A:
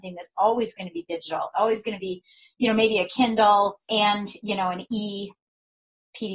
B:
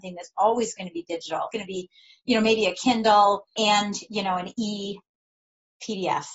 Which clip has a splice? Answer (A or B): B